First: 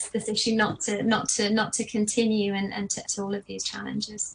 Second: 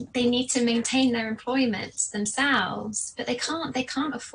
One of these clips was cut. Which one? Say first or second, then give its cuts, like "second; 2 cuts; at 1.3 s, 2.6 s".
first; 1 cut; at 3.0 s